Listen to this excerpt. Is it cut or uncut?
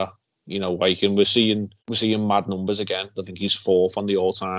cut